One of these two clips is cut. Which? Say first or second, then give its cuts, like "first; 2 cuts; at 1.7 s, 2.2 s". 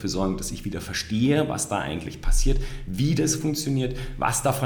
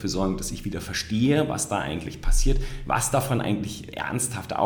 second; 1 cut; at 2.9 s